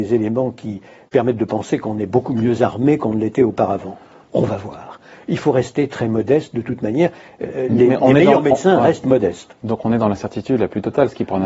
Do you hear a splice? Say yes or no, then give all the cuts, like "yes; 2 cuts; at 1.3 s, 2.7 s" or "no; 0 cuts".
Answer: no; 0 cuts